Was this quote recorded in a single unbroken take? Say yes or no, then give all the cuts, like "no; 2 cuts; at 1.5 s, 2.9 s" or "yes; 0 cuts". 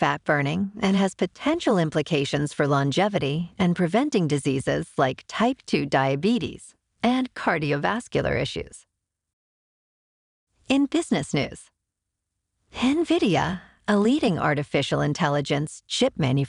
yes; 0 cuts